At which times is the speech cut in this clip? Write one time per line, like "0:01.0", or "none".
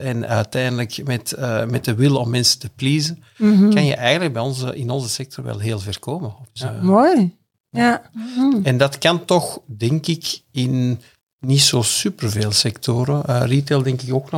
0:06.5
0:08.1

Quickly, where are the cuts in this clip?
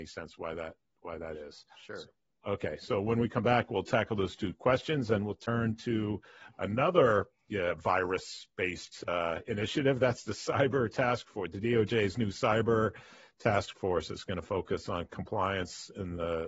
none

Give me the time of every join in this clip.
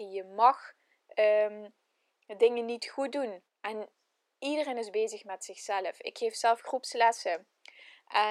0:03.5

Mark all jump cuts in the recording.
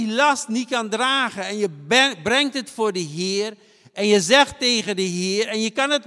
none

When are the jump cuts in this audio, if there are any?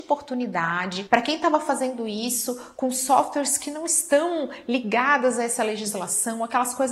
none

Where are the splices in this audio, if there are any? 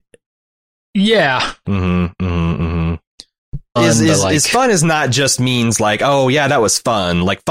0:01.6
0:03.8

